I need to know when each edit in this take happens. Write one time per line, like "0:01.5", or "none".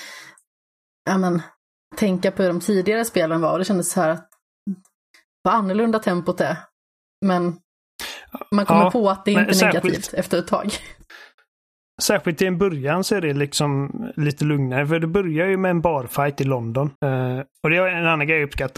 0:17.0